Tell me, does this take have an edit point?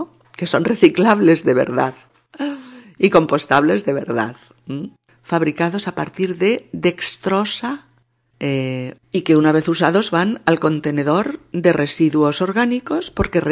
yes; 2 cuts; at 5.1 s, 9.0 s

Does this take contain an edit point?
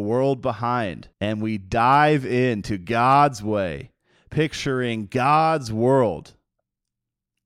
yes; 1 cut; at 1.1 s

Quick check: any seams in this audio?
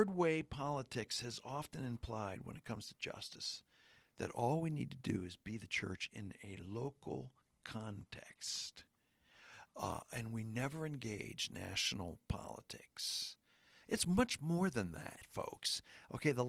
yes; 1 cut; at 13.8 s

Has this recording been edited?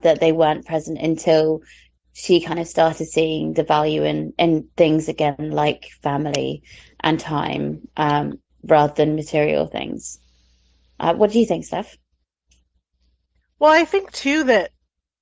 no; 0 cuts

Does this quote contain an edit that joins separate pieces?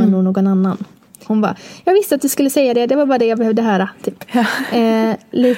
yes; 1 cut; at 1.3 s

